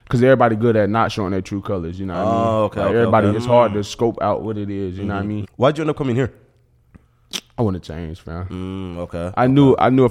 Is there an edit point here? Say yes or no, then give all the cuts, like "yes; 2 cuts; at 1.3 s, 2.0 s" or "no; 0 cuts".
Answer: yes; 2 cuts; at 3.3 s, 5.4 s